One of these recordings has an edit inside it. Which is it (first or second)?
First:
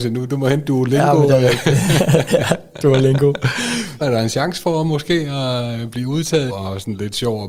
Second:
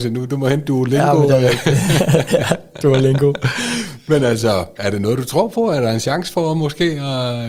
first